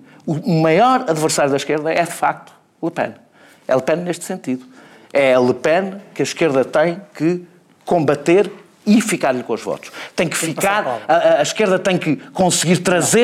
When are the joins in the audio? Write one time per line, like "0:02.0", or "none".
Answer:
none